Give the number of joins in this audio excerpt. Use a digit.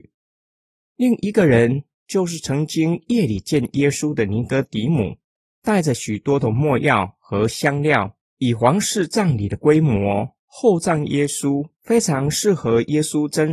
2